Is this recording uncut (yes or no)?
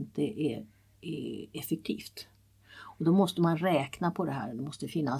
yes